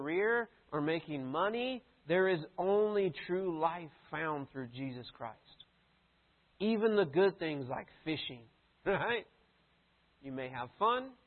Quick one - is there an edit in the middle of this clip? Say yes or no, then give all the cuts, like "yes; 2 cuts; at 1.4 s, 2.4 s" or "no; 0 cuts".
yes; 2 cuts; at 6.5 s, 10.1 s